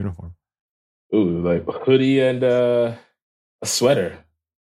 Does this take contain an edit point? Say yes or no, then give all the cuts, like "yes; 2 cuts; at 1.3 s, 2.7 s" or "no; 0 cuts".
no; 0 cuts